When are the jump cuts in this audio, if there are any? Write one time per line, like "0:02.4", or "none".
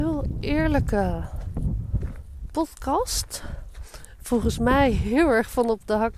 none

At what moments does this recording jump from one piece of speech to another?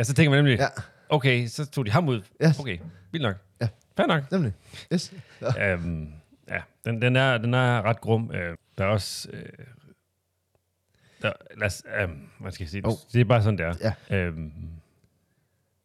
0:08.6
0:12.8
0:14.1

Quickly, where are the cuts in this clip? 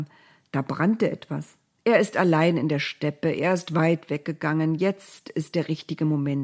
0:01.8

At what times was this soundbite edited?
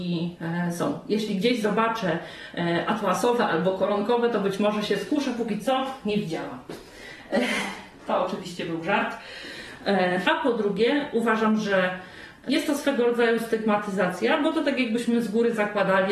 0:10.2

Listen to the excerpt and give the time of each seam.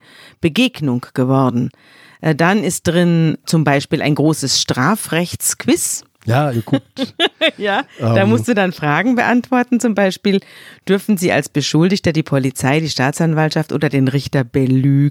0:06.5

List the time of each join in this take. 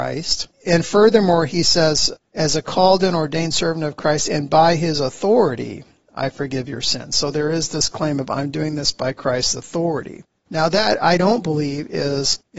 none

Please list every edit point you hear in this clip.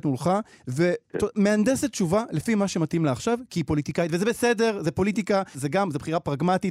0:05.5

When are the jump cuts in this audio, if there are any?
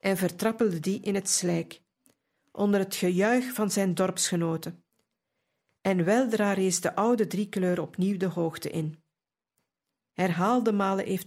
0:10.1

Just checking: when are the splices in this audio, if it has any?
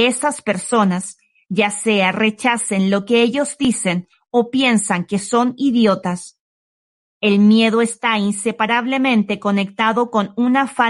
0:07.1

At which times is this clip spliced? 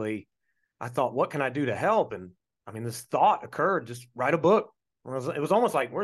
none

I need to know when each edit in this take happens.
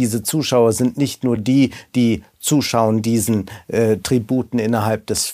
none

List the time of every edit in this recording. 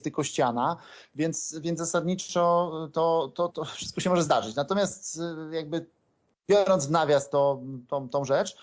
0:03.5

